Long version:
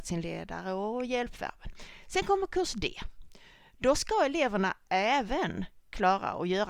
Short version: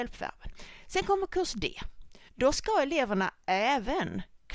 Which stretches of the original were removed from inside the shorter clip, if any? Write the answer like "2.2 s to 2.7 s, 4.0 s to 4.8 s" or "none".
3.5 s to 3.7 s